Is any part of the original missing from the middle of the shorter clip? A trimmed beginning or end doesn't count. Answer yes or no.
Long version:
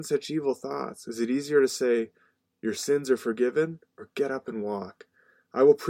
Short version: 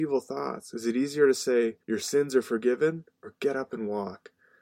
yes